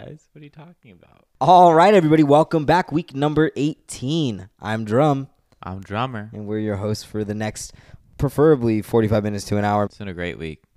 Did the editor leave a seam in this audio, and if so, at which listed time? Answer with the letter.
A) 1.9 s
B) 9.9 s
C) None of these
B